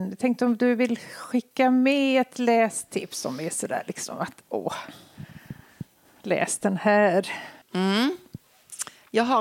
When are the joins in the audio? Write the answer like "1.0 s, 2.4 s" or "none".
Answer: 7.6 s